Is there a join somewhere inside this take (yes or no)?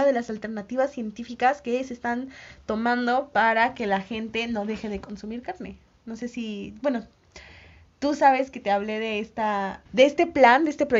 yes